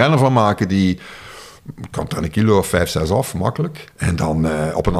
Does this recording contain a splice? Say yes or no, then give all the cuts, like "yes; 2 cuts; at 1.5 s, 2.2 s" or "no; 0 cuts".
yes; 1 cut; at 3.9 s